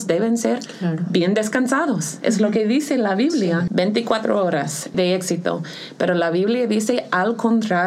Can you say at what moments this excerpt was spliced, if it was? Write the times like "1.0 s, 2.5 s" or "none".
3.7 s, 4.9 s